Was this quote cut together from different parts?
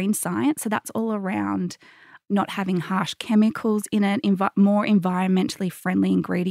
no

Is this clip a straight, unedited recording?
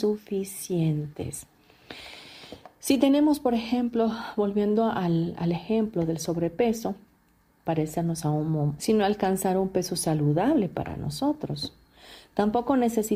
no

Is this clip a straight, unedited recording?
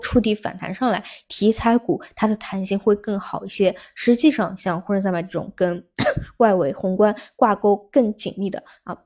no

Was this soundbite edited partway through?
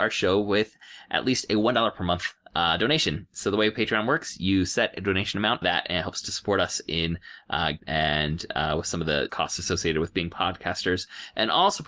yes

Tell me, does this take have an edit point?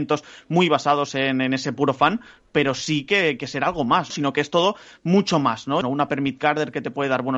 yes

